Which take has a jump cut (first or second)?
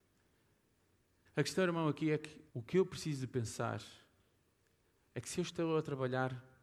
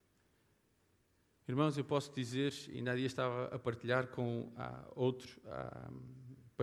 first